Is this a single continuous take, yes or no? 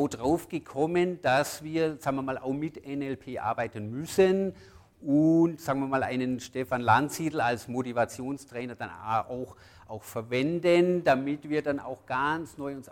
yes